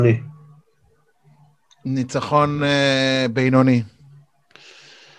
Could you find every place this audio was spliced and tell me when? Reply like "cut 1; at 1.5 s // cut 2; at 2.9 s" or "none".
none